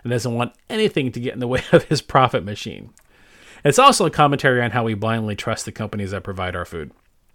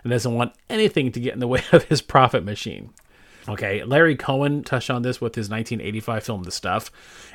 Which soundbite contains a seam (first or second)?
second